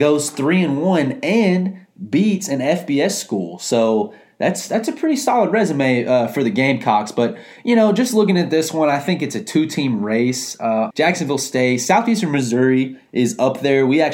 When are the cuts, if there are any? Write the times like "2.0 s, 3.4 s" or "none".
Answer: 10.9 s